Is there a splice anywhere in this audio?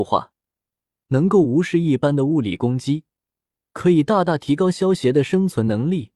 no; 0 cuts

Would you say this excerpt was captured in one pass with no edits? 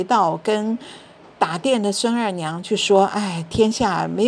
yes; 0 cuts

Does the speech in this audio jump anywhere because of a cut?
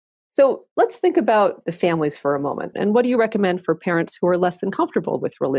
yes; 1 cut; at 2.7 s

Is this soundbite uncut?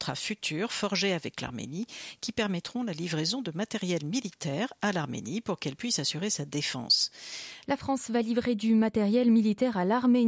no; 1 cut; at 7.6 s

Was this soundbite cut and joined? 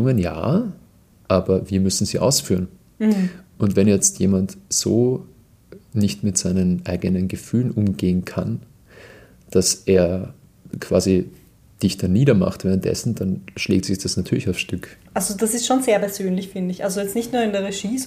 yes; 1 cut; at 15.1 s

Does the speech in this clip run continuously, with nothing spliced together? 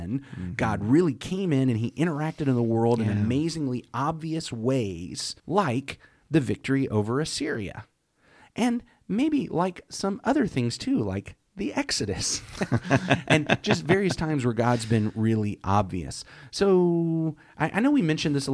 no; 1 cut; at 5.4 s

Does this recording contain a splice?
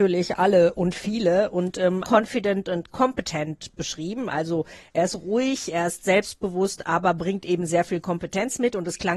yes; 1 cut; at 2.0 s

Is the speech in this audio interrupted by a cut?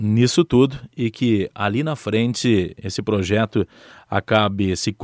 no; 0 cuts

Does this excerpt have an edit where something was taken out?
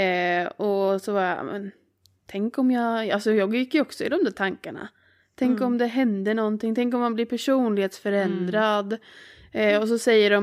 no; 0 cuts

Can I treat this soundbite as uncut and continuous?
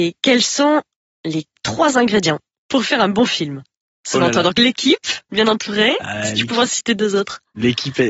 yes; 0 cuts

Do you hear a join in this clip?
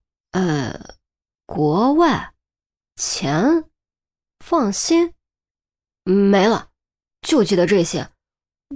yes; 1 cut; at 5.9 s

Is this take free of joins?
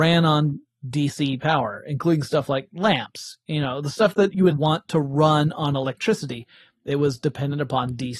no; 1 cut; at 4.5 s

